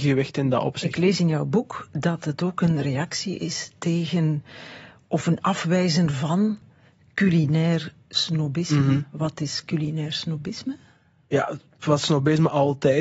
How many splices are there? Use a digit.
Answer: 0